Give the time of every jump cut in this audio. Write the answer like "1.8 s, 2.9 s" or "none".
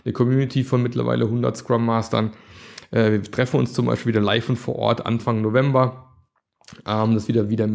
none

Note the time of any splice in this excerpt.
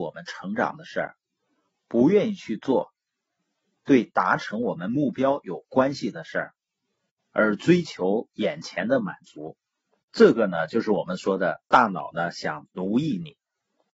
none

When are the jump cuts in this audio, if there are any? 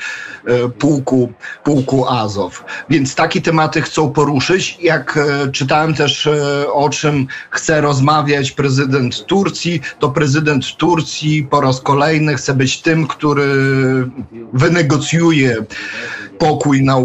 none

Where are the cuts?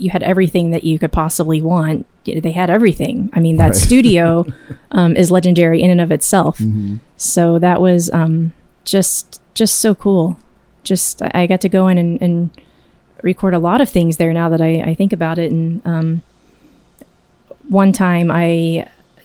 none

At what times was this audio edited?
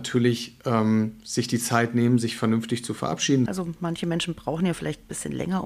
3.5 s

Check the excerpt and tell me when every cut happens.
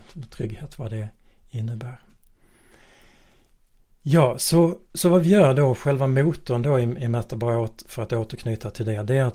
none

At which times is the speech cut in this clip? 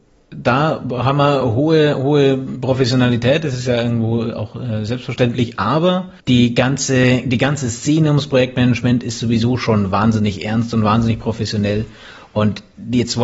6.2 s

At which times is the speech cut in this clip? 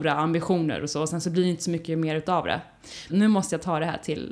3.1 s

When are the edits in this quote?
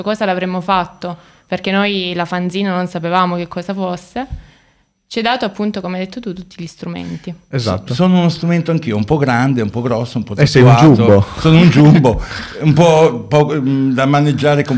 none

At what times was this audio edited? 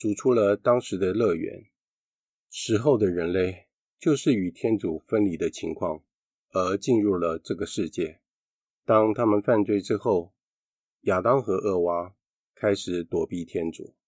8.7 s

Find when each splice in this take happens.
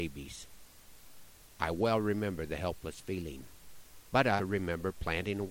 4.4 s

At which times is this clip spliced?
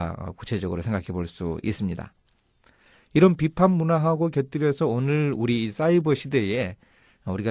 none

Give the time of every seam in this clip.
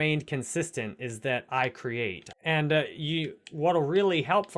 2.3 s

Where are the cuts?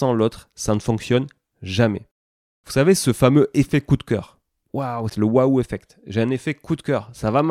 5.1 s

